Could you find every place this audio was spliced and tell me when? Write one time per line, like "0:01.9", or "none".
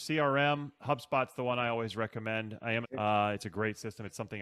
0:02.8